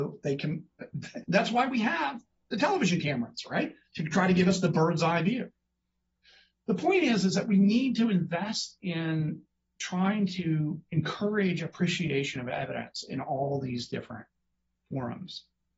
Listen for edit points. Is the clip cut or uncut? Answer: cut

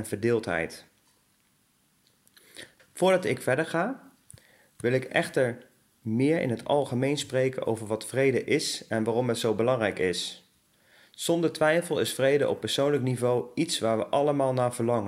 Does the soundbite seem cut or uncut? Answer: cut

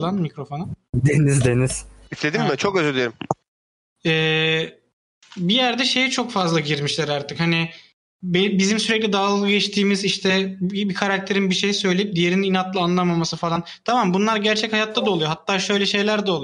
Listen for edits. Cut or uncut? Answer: uncut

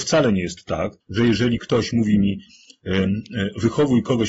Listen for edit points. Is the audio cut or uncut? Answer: cut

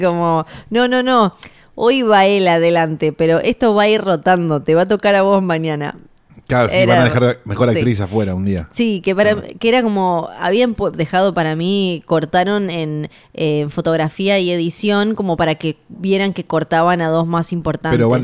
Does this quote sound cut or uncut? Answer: uncut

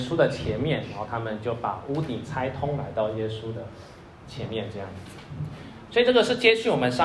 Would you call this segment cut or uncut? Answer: cut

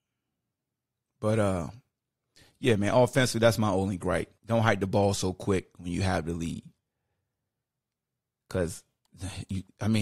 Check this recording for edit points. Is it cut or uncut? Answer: cut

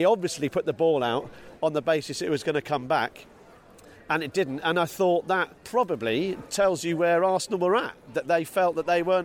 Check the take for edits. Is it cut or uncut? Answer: cut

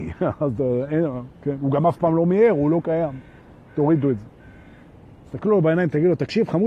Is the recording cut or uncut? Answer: uncut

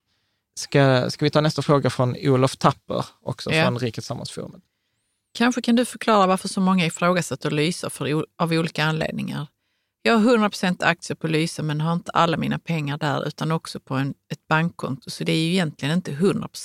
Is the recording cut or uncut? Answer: uncut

